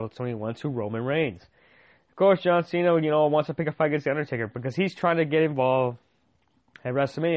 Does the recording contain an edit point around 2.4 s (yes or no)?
no